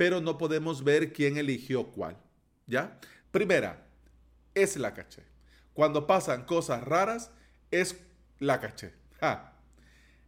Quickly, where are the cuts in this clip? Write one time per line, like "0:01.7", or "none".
0:03.2